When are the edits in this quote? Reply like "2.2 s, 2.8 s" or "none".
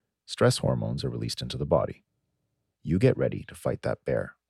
2.7 s

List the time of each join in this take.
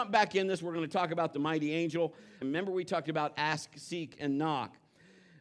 2.4 s

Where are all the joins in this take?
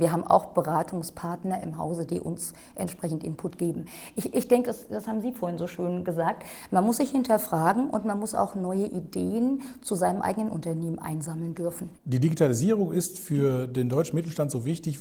4.6 s, 11.9 s

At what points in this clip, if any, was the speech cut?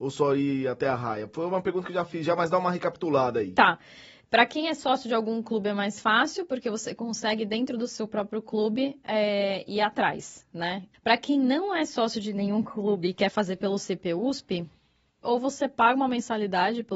10.9 s, 15.2 s

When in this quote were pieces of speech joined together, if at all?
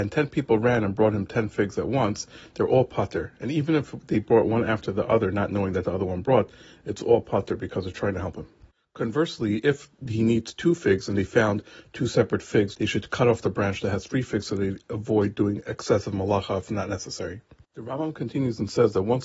12.7 s, 17.6 s

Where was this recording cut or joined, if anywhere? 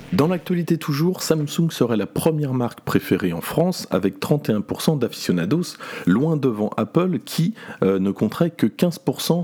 none

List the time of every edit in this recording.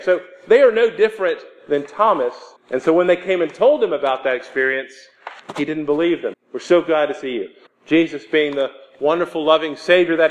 2.6 s, 6.3 s, 7.7 s

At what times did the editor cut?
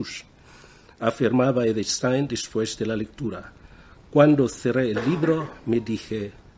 none

